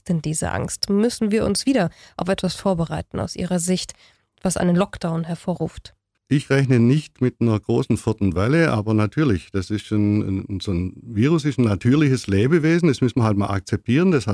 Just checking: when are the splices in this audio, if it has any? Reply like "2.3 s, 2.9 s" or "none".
none

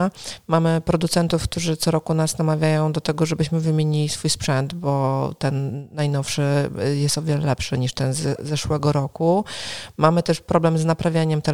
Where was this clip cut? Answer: none

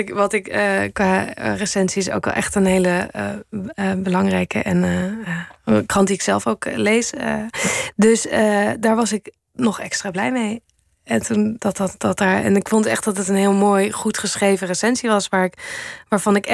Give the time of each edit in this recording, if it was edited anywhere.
11.6 s

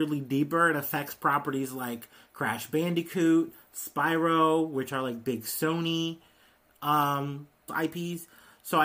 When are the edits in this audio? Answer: 7.7 s

